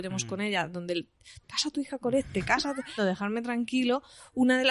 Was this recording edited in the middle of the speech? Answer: yes; 2 cuts; at 1.4 s, 3.0 s

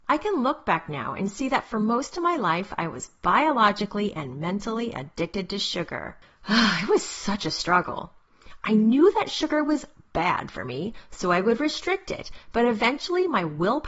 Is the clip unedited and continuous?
yes; 0 cuts

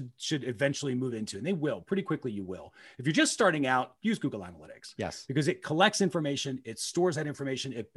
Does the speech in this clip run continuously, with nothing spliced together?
yes; 0 cuts

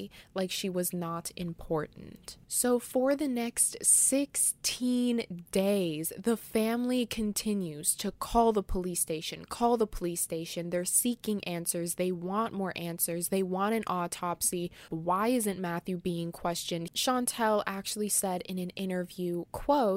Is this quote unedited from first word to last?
no; 2 cuts; at 14.9 s, 16.9 s

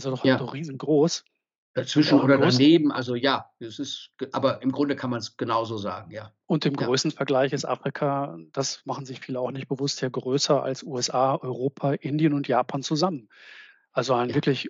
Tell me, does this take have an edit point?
no; 0 cuts

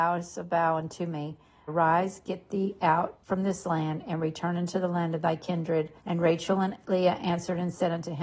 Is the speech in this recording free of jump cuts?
no; 2 cuts; at 1.7 s, 6.0 s

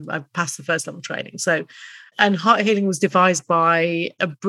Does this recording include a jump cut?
no; 0 cuts

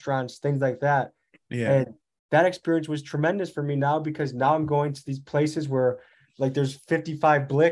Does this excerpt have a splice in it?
no; 0 cuts

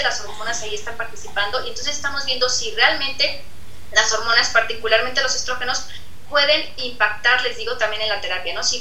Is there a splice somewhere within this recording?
no; 0 cuts

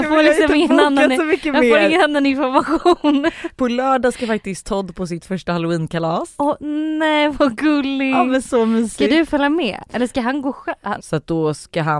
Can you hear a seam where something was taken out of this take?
yes; 2 cuts; at 3.6 s, 11.0 s

